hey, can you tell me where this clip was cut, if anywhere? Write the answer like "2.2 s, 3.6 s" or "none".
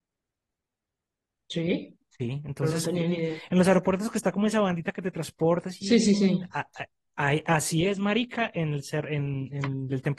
none

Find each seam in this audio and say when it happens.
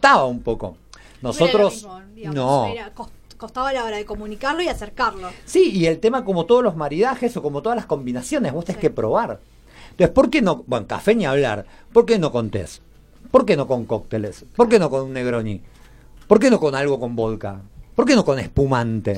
none

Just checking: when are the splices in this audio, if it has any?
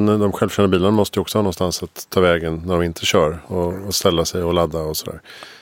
none

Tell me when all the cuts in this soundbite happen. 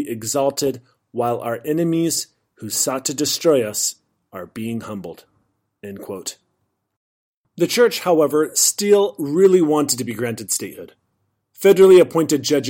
none

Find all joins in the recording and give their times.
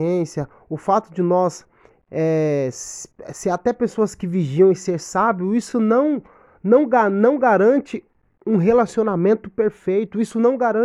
none

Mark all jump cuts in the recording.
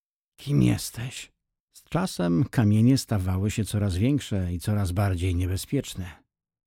1.6 s

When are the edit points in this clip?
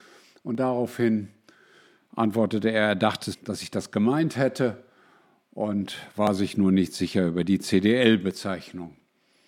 3.3 s

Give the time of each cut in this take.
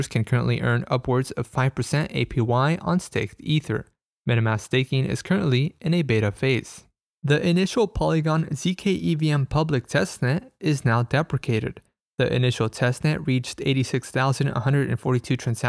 none

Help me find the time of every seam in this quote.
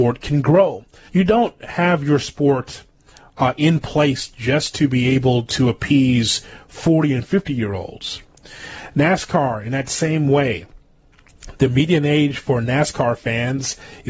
1.1 s

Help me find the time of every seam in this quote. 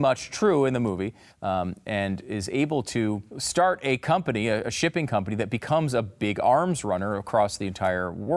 1.3 s, 3.3 s

